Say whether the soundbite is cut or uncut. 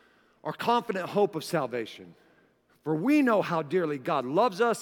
cut